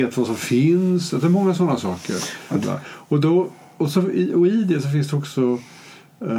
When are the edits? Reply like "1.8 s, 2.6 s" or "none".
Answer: 2.6 s